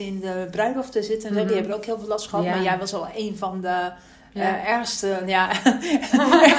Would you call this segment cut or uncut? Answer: uncut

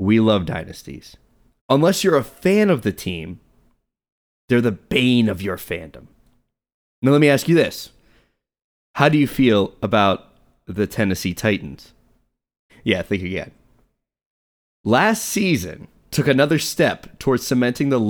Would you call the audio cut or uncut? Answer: cut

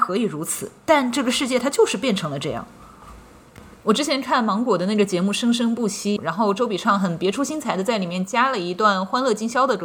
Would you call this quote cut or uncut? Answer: cut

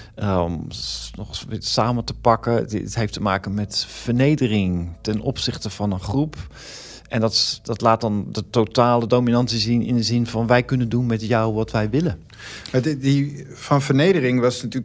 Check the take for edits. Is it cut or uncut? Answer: uncut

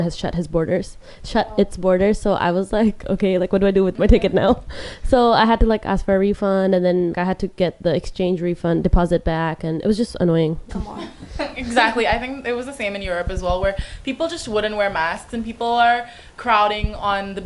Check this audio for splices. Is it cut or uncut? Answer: cut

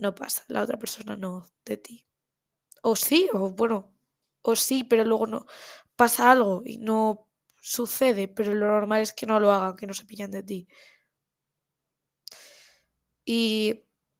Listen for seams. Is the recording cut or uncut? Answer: uncut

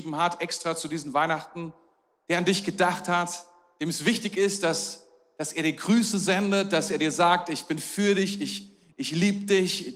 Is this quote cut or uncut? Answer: uncut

